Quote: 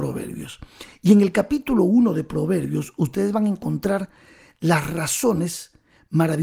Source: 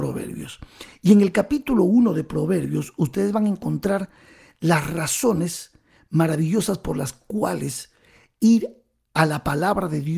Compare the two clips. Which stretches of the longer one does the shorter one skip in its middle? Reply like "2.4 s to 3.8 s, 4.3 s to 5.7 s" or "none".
none